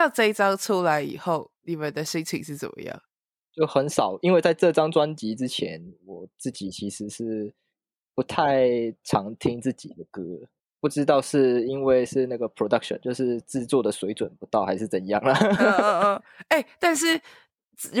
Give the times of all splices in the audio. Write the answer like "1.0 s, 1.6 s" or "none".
3.4 s